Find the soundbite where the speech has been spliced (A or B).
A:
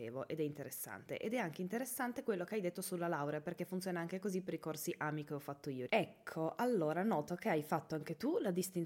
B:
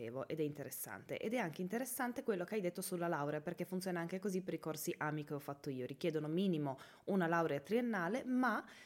A